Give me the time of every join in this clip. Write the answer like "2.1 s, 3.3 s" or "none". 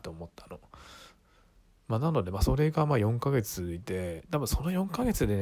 none